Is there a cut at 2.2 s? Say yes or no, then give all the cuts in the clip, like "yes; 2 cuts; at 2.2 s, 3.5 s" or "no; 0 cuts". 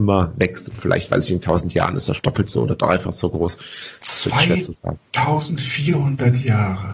yes; 1 cut; at 2.2 s